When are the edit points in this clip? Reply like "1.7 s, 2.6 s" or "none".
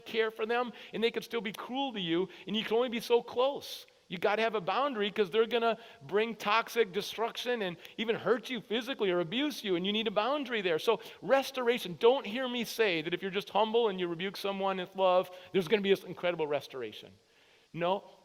none